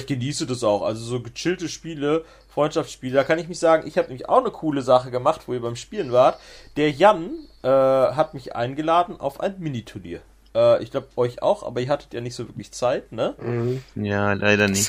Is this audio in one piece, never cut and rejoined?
yes; 0 cuts

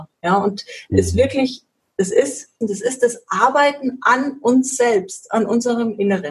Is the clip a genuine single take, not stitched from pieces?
no; 1 cut; at 2.6 s

